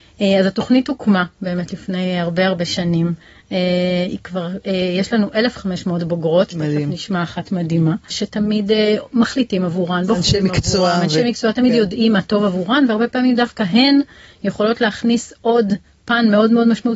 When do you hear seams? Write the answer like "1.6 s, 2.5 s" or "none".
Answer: 8.1 s